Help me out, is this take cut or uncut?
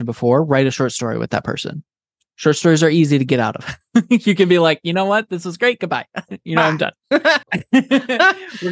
cut